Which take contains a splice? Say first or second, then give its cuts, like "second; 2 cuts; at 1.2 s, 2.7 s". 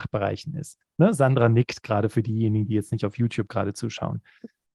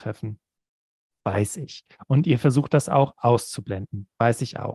second; 1 cut; at 1.1 s